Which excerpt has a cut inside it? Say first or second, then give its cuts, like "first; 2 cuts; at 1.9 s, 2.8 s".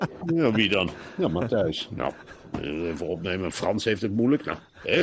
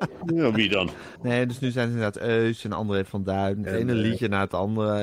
second; 2 cuts; at 1.2 s, 3.7 s